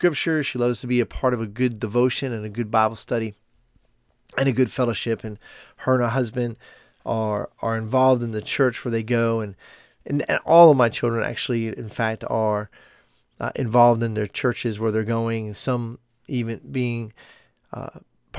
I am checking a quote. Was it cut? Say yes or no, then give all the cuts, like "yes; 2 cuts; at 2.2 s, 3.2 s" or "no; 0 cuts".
no; 0 cuts